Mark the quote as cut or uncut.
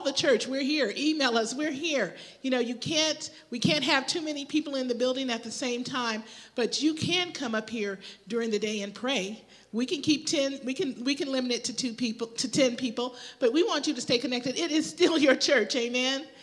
uncut